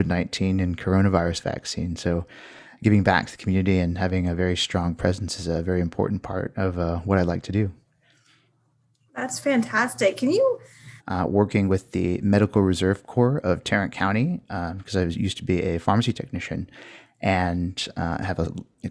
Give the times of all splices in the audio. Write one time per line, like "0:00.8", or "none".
0:11.0